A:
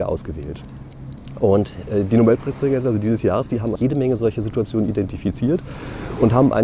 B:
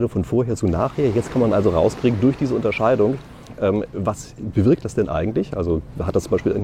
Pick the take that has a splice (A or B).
A